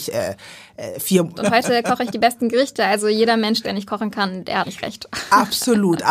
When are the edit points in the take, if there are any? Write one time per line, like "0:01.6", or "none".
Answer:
0:01.3
0:03.6
0:04.6